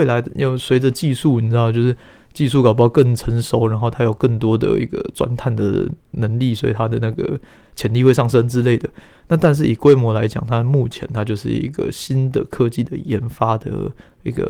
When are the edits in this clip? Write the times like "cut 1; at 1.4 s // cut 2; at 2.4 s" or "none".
none

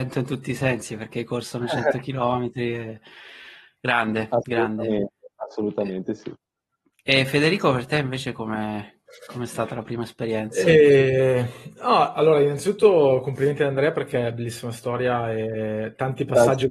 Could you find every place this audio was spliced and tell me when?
none

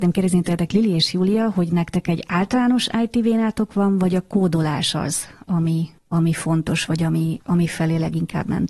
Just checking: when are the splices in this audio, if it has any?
cut 1; at 6.0 s // cut 2; at 7.4 s

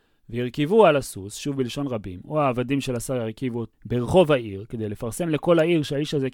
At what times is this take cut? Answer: cut 1; at 3.7 s

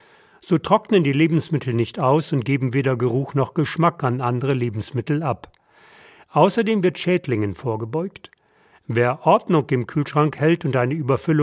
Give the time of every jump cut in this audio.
none

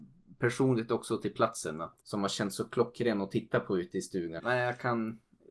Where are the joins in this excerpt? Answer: cut 1; at 2.0 s // cut 2; at 4.4 s

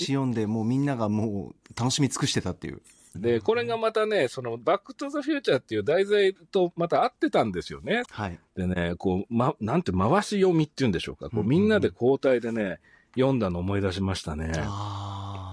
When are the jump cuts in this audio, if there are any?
cut 1; at 3.1 s // cut 2; at 8.0 s

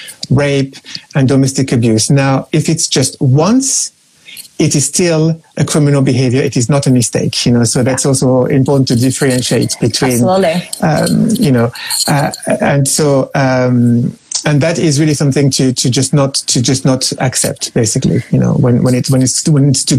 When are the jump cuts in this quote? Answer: none

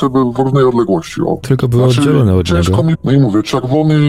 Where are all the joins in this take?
cut 1; at 1.4 s // cut 2; at 2.9 s

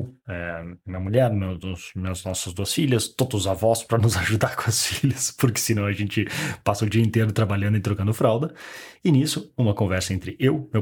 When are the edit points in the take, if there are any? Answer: none

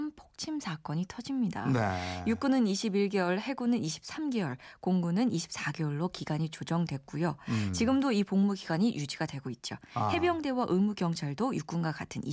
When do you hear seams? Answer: none

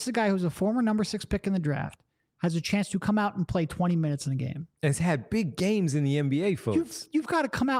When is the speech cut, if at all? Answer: none

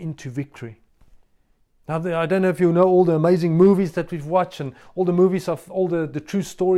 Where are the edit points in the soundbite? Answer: none

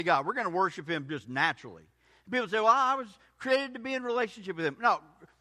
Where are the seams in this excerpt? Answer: none

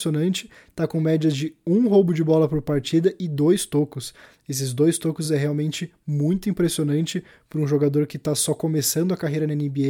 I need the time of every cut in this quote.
none

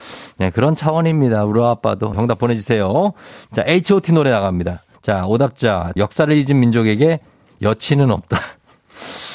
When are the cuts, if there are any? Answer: cut 1; at 2.1 s // cut 2; at 4.9 s // cut 3; at 6.0 s

